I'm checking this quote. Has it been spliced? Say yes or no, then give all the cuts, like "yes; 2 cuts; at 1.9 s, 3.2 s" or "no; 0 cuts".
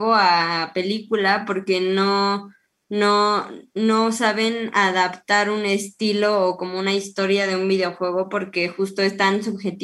no; 0 cuts